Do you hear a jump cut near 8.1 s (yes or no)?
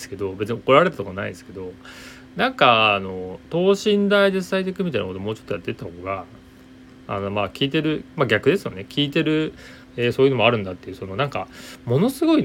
no